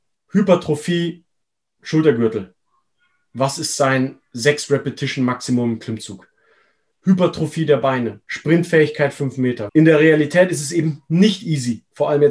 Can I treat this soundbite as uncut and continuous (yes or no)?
no